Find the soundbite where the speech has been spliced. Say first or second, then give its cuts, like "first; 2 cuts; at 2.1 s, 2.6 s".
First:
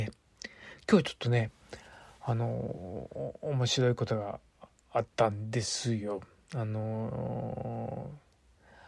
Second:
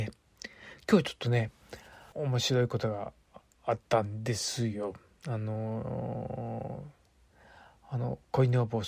second; 1 cut; at 2.1 s